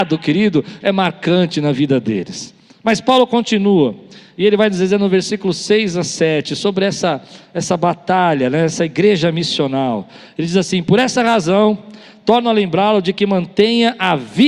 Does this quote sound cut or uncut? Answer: uncut